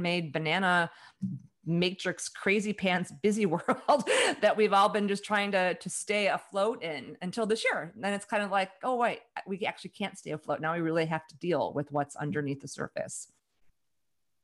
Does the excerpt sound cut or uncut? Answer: uncut